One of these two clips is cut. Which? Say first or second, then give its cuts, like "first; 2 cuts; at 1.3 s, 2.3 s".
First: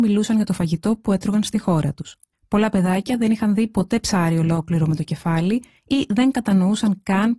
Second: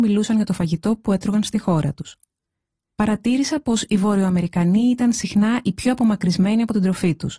first; 1 cut; at 2.3 s